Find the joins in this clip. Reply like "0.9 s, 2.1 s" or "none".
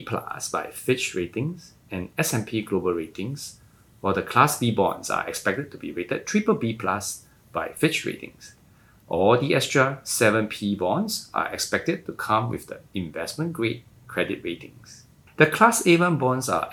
15.3 s